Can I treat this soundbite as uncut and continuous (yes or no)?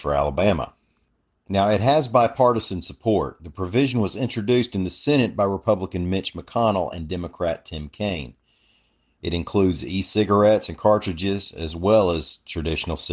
yes